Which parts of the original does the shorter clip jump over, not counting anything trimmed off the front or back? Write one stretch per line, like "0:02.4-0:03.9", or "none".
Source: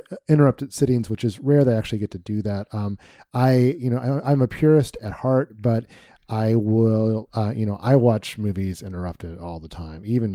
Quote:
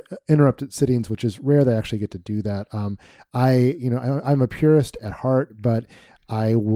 none

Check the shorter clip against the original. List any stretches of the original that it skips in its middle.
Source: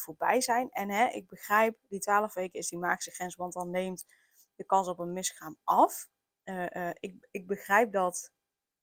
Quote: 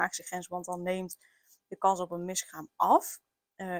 none

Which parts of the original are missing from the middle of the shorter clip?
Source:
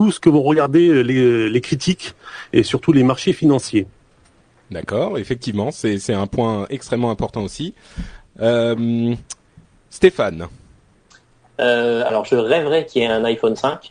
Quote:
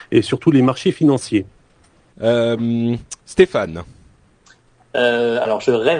0:04.5-0:08.3
0:09.4-0:09.8

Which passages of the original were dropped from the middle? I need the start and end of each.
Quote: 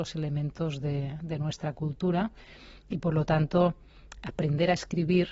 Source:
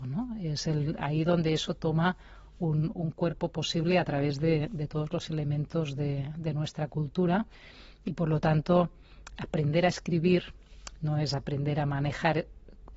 none

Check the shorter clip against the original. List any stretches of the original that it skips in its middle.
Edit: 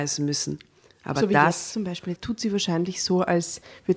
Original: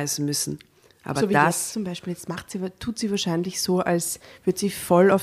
0:02.2-0:02.7

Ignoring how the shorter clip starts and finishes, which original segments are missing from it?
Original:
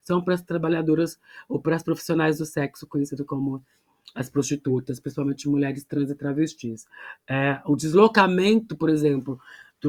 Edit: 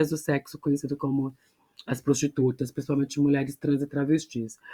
none

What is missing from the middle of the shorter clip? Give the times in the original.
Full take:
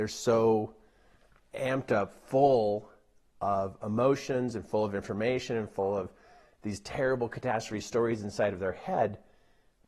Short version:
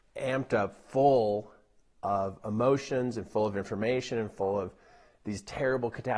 none

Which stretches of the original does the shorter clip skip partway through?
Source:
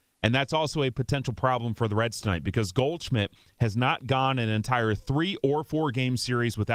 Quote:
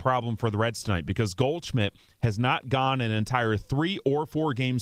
none

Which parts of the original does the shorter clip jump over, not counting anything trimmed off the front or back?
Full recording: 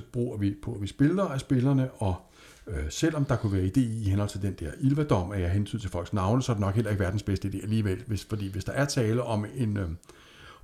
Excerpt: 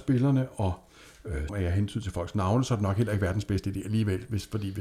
0:02.9-0:05.3

